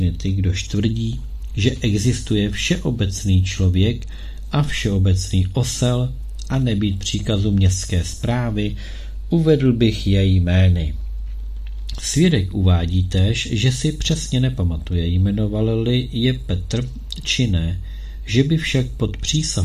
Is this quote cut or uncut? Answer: cut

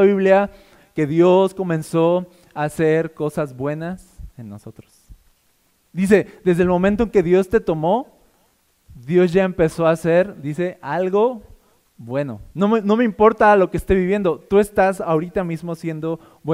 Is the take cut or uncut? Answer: cut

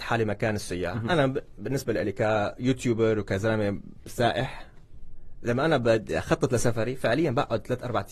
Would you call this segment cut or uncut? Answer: uncut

